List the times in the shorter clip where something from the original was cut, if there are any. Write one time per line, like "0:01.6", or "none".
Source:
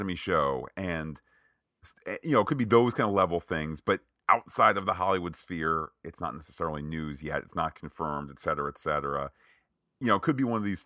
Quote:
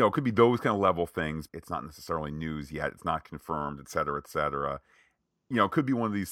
0:01.5